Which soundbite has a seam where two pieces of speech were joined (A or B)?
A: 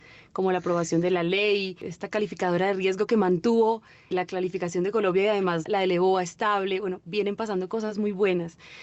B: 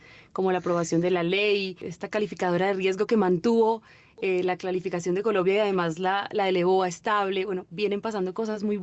A